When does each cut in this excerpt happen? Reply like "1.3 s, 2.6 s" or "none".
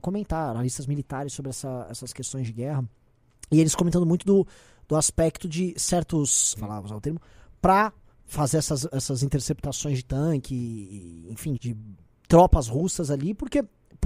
6.6 s, 11.6 s